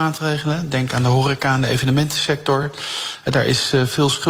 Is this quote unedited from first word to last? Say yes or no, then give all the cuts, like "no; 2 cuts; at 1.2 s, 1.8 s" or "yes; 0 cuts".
yes; 0 cuts